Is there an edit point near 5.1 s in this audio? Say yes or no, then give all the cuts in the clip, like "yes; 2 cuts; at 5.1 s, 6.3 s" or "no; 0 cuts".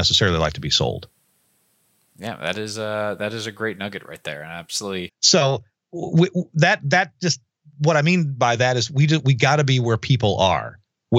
yes; 1 cut; at 5.1 s